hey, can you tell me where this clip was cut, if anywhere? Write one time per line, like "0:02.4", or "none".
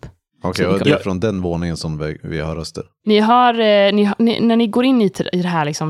none